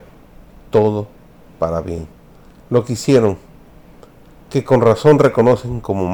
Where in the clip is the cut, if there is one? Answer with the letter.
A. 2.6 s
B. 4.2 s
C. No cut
C